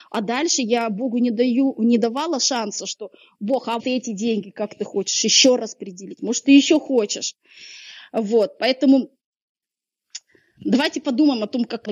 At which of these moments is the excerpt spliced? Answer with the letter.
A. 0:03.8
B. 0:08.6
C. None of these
A